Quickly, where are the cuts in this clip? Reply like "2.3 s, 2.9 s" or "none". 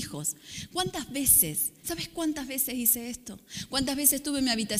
1.8 s